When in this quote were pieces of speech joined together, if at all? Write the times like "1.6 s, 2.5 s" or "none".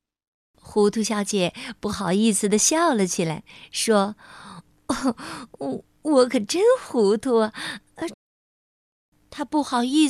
8.1 s